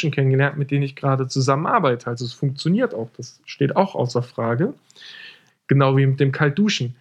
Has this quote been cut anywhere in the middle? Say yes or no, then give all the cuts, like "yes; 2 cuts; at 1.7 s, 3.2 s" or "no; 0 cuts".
yes; 1 cut; at 5.5 s